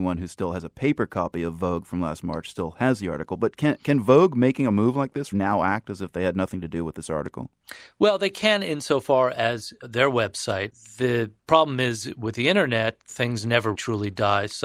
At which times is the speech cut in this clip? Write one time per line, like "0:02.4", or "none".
0:05.3
0:13.7